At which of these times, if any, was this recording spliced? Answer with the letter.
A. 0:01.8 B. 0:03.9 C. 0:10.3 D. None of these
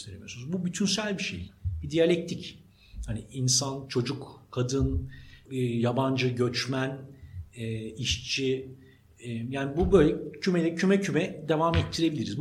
D